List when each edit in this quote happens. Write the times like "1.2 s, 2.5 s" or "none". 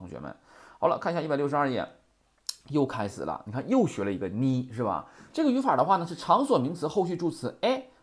2.6 s, 5.3 s